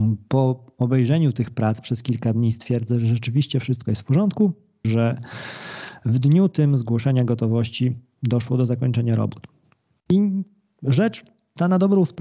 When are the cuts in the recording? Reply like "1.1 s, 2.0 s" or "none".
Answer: 4.8 s